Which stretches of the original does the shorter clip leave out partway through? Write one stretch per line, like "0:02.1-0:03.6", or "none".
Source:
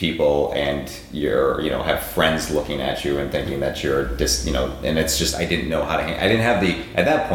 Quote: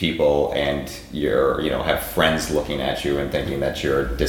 none